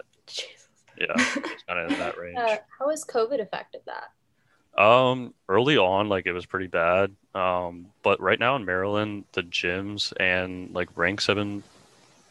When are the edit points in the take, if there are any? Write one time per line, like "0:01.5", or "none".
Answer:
none